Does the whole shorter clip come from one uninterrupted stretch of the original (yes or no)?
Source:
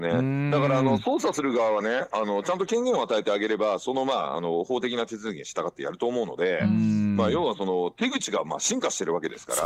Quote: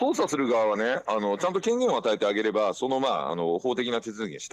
yes